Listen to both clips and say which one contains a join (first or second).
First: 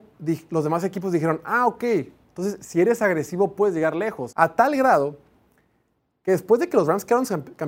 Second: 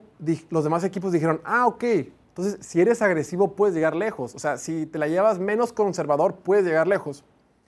first